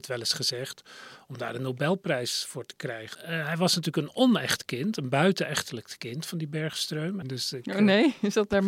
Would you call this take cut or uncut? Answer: cut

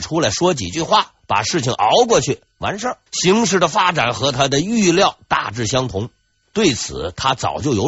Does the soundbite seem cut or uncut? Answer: cut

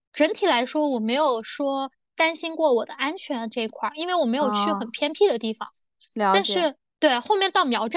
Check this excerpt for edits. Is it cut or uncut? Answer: uncut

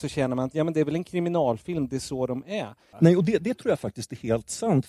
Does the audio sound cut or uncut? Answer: cut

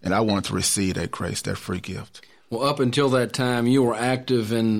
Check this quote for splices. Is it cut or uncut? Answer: uncut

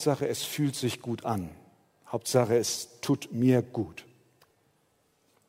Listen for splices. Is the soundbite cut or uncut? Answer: uncut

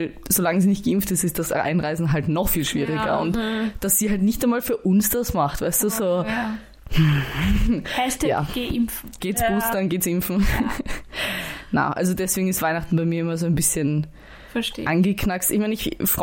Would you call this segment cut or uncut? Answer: cut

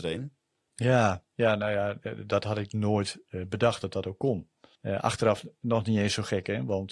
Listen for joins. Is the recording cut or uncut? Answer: cut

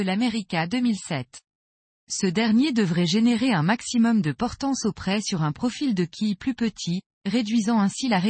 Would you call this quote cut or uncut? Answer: cut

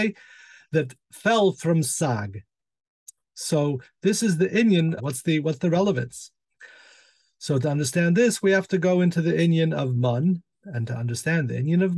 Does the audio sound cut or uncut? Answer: cut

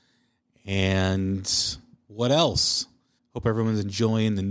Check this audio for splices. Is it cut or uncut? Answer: cut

